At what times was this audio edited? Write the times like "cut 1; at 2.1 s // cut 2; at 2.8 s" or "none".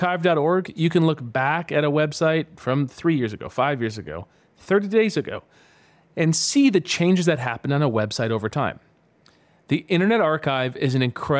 none